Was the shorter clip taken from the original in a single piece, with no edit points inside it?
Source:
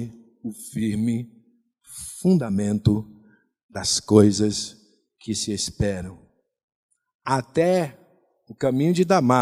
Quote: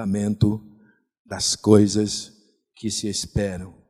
yes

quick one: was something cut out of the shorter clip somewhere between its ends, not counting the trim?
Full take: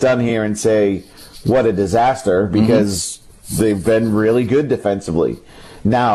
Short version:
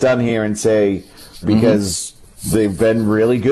yes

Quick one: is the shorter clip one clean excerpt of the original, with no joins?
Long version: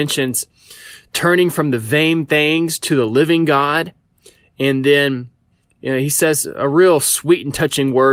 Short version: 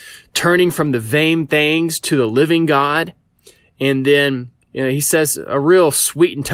no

